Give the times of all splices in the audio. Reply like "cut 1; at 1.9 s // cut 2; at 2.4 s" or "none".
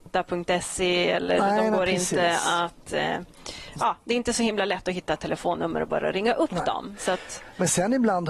none